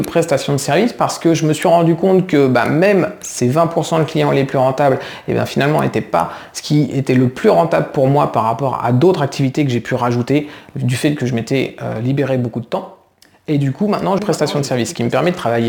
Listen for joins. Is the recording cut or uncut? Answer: cut